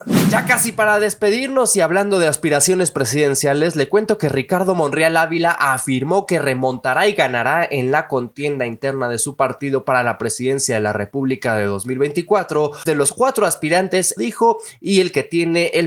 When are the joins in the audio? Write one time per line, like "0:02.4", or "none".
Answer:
0:12.9
0:14.2